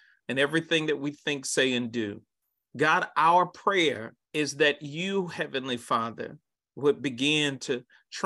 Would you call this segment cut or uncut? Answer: cut